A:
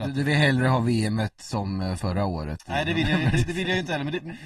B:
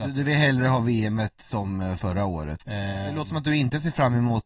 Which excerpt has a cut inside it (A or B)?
B